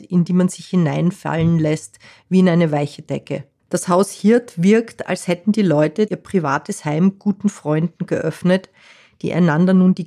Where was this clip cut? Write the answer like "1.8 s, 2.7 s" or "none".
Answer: 3.6 s, 6.1 s